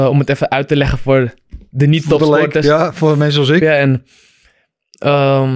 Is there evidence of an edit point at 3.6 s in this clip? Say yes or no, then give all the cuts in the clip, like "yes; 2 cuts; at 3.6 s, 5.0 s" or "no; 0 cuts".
yes; 1 cut; at 3.6 s